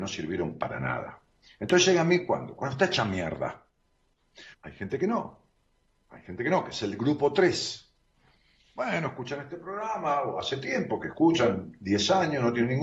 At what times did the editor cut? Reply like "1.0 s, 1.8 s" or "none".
4.5 s